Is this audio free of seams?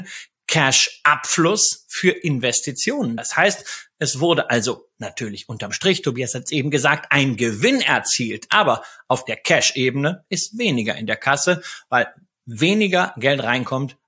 yes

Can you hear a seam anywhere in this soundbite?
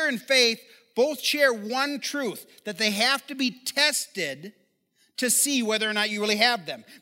no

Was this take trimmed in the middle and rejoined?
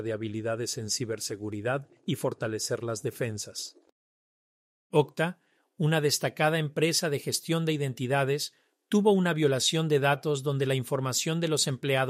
no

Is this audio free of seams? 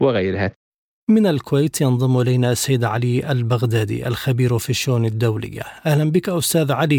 no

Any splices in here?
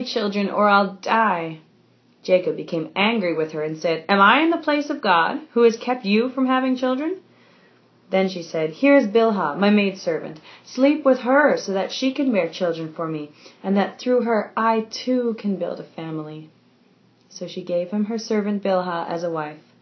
no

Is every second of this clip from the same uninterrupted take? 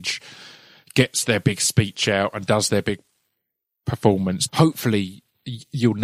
no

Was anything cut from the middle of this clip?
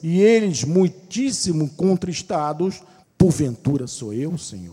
yes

